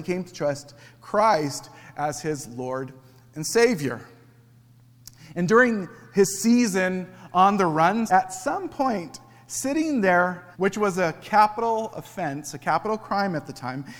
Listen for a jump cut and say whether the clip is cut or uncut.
cut